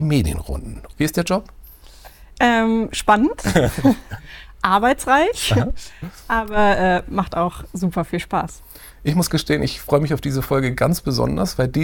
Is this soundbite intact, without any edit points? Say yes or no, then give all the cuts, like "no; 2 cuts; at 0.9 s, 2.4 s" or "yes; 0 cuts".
no; 1 cut; at 0.9 s